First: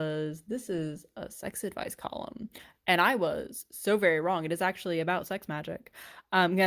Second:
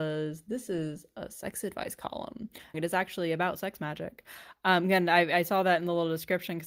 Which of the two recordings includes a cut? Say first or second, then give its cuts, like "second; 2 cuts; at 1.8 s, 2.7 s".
second; 1 cut; at 2.7 s